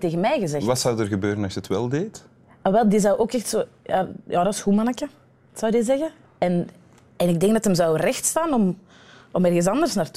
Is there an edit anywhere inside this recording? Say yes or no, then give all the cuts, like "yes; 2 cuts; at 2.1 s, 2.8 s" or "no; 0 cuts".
no; 0 cuts